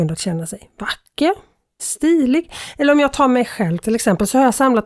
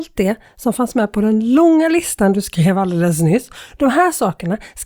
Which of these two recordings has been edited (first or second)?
first